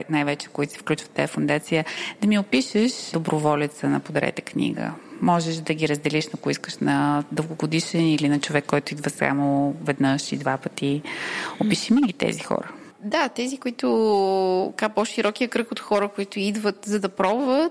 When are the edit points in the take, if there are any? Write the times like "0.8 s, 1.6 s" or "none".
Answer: none